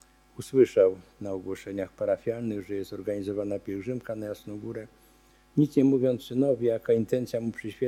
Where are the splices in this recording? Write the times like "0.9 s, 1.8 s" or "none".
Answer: none

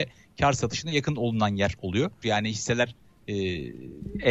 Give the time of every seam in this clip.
2.2 s

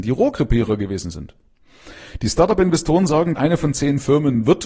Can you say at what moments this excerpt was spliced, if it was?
3.4 s

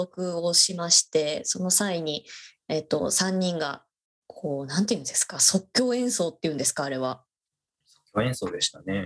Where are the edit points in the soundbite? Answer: none

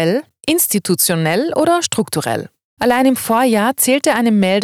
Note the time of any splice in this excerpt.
2.8 s

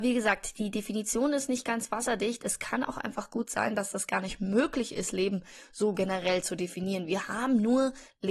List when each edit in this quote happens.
none

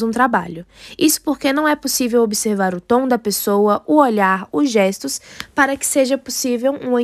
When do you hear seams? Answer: none

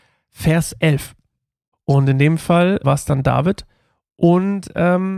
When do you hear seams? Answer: 1.7 s, 2.8 s

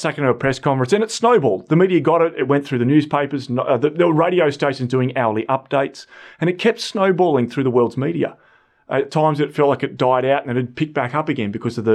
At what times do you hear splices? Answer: none

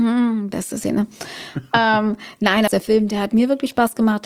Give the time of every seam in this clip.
2.7 s

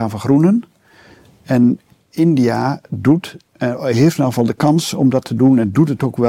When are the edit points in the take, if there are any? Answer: none

